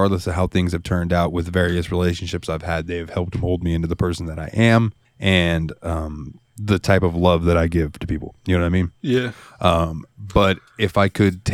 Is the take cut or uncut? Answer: uncut